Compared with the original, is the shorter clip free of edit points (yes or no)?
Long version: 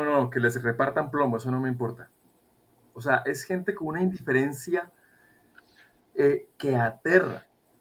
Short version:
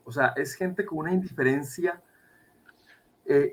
yes